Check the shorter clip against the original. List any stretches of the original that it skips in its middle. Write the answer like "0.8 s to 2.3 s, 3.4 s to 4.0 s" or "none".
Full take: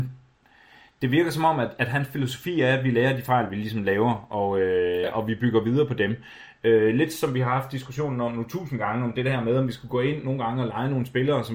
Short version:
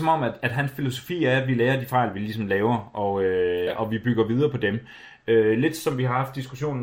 none